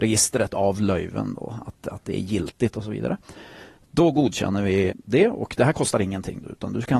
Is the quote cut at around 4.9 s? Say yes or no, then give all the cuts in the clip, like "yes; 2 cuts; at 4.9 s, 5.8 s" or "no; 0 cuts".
yes; 1 cut; at 4.9 s